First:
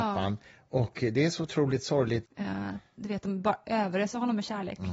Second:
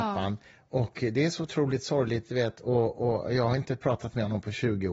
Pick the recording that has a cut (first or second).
first